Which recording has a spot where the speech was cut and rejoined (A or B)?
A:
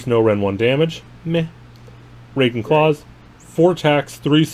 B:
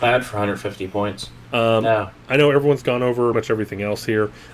B